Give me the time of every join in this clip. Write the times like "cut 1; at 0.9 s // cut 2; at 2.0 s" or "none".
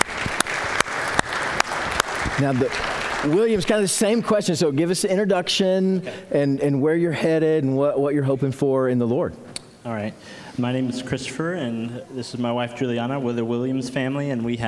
none